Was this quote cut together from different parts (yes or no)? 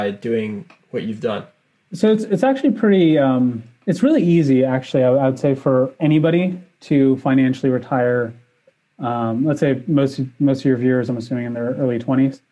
no